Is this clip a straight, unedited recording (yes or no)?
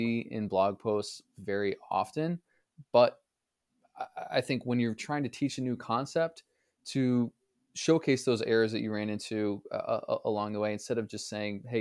yes